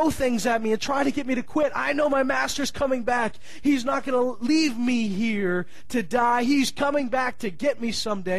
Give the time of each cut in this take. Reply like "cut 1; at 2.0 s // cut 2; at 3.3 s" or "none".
none